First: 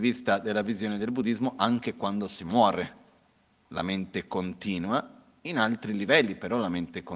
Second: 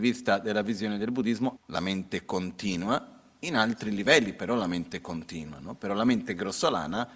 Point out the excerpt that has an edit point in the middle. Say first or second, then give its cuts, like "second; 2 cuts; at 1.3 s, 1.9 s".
second; 1 cut; at 1.6 s